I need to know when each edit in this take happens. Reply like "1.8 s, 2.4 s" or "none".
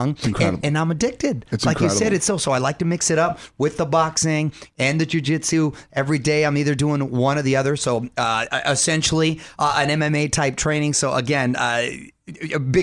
none